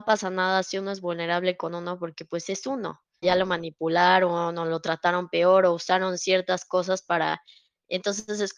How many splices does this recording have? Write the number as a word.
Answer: one